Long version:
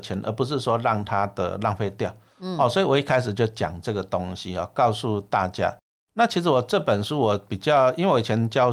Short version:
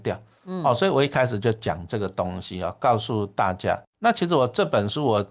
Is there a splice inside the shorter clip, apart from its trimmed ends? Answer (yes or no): yes